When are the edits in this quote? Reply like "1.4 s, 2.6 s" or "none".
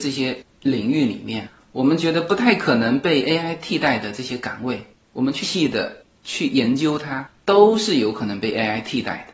5.4 s